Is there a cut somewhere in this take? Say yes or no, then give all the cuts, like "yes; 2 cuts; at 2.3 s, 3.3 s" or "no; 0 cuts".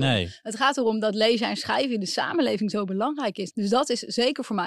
yes; 1 cut; at 3.5 s